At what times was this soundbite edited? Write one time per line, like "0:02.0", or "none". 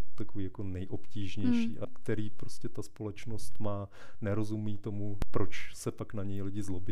0:01.8